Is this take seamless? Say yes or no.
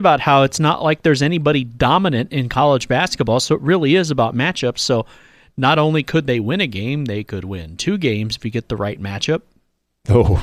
yes